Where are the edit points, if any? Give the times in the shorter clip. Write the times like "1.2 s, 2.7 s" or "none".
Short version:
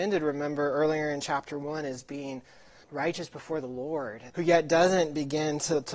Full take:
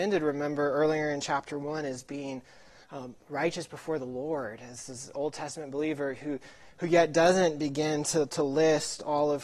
2.8 s, 4.3 s